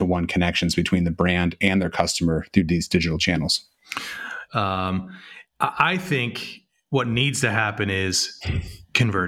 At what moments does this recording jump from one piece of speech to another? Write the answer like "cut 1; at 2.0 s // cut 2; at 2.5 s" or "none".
cut 1; at 4.5 s